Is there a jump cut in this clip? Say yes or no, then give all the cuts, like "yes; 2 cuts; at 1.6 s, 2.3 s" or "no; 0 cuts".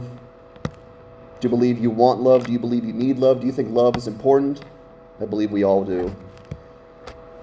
no; 0 cuts